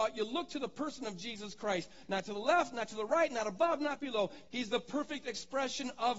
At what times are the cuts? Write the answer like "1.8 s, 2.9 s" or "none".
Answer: 4.5 s